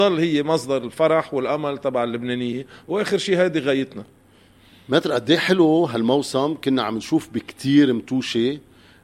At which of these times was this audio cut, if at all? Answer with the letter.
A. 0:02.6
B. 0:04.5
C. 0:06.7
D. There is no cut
D